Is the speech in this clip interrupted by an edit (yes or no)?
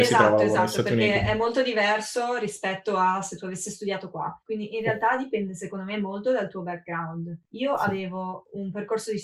no